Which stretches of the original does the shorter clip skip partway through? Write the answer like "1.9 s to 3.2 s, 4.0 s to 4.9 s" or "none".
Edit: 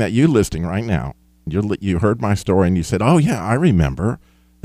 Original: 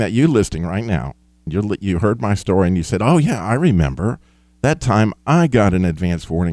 none